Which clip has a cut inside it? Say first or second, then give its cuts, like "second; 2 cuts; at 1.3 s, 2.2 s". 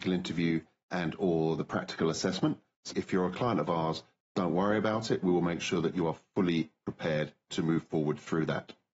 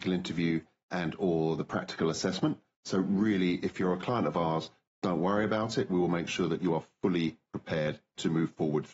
first; 1 cut; at 2.9 s